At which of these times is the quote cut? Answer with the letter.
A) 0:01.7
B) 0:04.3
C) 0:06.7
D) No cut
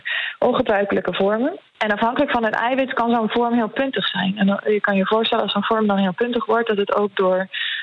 A